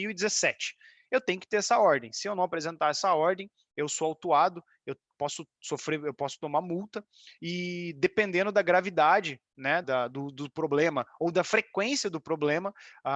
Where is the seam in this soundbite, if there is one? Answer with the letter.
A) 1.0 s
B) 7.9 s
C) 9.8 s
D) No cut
C